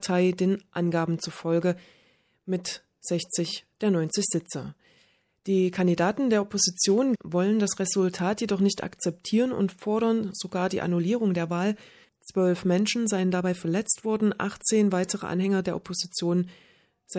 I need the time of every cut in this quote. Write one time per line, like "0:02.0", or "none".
0:07.1
0:12.0